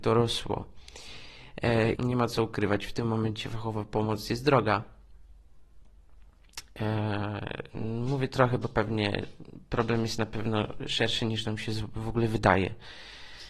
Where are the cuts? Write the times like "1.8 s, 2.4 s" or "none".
2.0 s, 7.7 s